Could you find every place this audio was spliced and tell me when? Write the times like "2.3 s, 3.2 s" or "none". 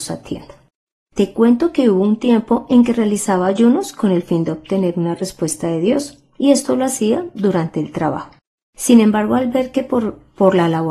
none